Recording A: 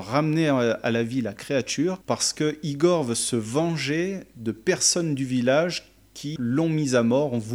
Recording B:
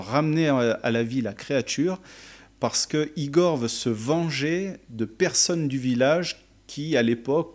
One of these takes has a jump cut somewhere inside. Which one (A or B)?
A